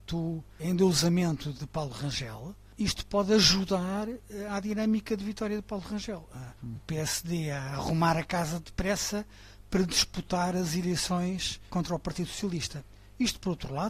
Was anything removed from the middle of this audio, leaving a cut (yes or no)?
yes